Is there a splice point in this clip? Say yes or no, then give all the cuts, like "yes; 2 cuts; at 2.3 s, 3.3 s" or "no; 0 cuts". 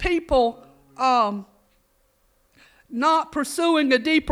no; 0 cuts